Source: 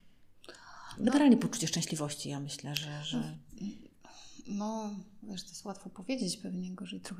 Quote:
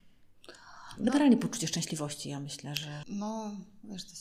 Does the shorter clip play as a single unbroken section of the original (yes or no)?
no